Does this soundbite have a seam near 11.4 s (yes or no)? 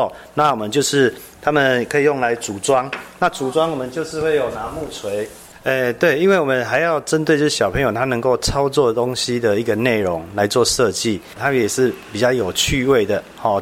yes